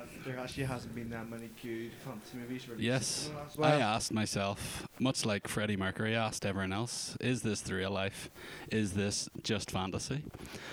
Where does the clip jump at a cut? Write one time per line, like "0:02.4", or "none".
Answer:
0:03.6

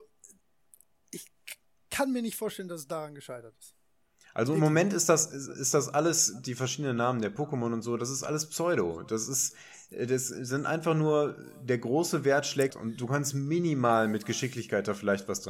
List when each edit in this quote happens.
0:12.7

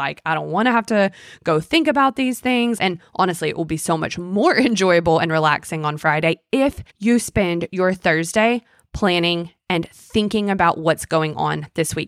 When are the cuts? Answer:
0:02.8
0:06.9

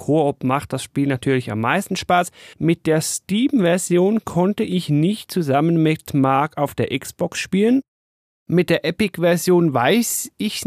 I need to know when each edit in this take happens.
0:02.5

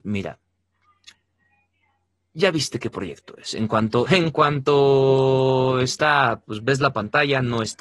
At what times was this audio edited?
0:04.1

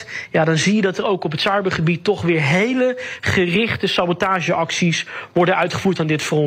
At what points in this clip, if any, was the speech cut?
none

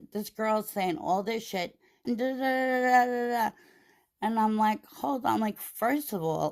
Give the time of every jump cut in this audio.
0:02.0

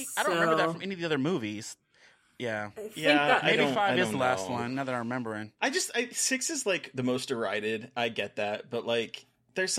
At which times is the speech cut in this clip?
none

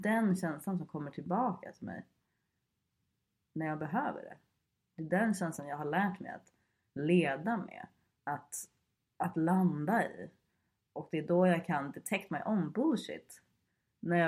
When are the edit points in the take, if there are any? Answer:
none

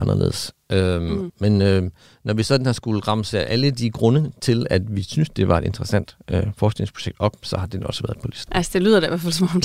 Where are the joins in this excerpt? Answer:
0:01.3

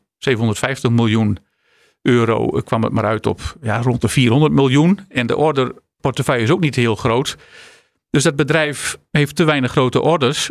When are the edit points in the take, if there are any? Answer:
none

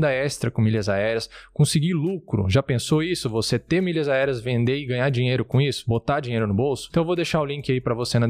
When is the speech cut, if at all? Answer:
0:06.9

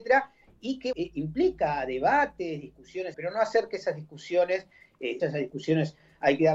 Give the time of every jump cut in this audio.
0:00.9
0:03.1
0:05.2

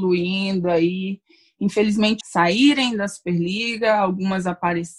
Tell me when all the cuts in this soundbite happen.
0:02.2

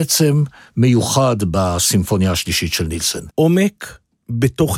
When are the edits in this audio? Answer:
0:03.3

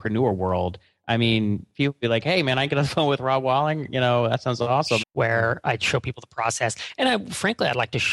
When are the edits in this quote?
0:05.0

